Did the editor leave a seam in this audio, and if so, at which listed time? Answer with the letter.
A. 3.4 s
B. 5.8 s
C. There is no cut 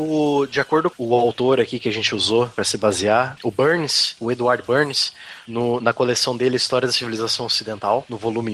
A